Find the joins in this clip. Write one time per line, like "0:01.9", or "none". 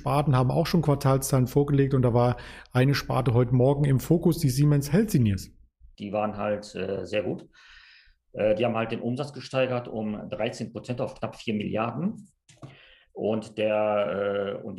0:05.9

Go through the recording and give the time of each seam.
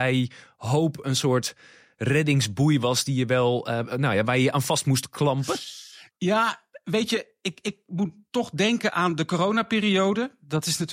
none

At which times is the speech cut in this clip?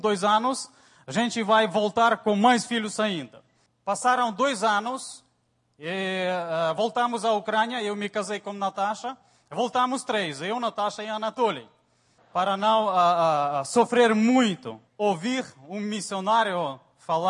0:03.7
0:12.2
0:14.9

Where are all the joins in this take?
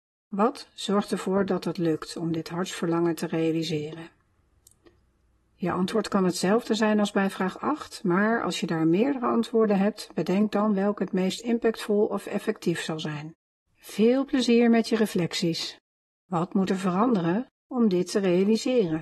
0:13.7
0:16.2
0:17.5

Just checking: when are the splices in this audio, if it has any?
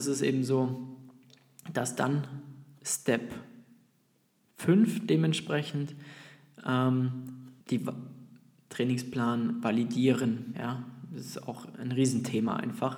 0:07.6
0:10.5

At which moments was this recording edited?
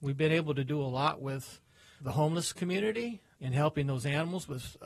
0:02.0
0:03.3

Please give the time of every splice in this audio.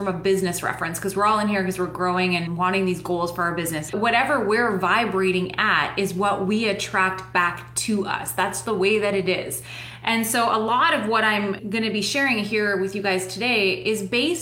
0:03.9
0:08.6

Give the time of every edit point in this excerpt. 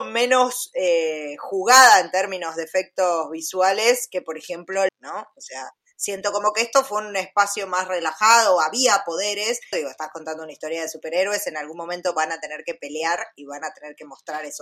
0:04.9
0:09.7

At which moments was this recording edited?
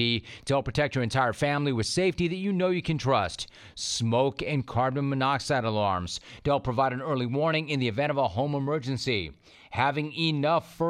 none

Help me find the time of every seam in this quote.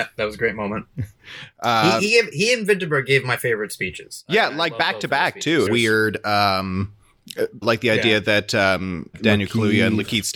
0:05.7
0:07.6
0:09.1

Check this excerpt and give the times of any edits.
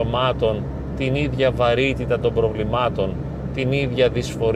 none

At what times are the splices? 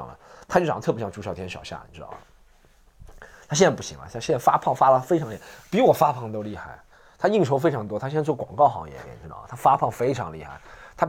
0:09.1

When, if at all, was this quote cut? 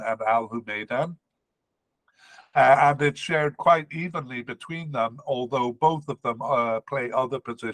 none

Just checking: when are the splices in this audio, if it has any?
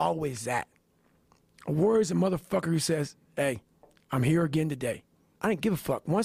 0:05.3

